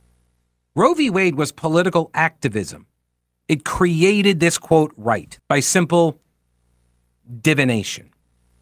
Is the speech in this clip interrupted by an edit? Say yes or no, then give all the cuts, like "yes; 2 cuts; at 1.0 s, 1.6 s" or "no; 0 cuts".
yes; 2 cuts; at 3.4 s, 5.4 s